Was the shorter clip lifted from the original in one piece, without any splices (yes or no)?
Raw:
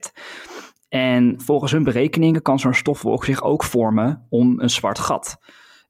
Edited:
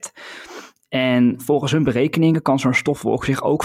yes